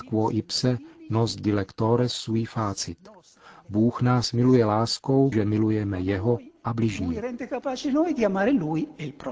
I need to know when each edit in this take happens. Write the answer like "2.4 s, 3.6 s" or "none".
5.3 s